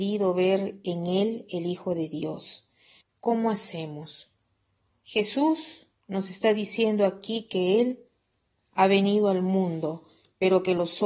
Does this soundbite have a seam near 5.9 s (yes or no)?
yes